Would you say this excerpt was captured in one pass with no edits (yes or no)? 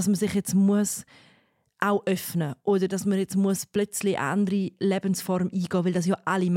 yes